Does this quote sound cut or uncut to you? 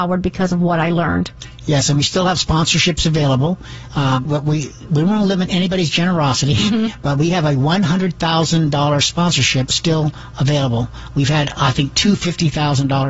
cut